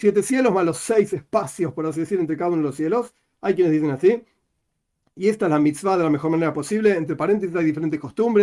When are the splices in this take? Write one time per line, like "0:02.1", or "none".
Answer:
none